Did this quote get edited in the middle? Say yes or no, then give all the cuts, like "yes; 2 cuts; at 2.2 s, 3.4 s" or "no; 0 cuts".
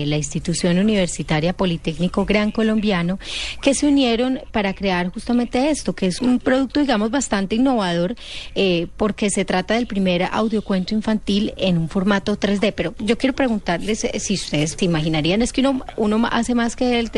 yes; 2 cuts; at 6.2 s, 14.8 s